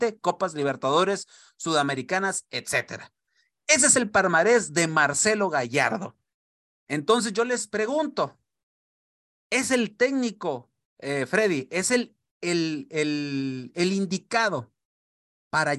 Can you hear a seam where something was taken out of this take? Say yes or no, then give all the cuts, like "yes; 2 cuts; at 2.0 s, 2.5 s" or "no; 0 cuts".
no; 0 cuts